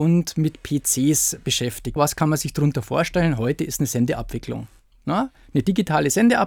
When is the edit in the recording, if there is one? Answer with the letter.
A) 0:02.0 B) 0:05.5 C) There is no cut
A